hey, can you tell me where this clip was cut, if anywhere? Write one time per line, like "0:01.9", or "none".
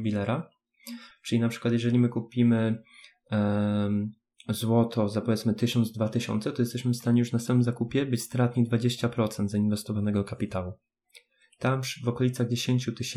0:01.1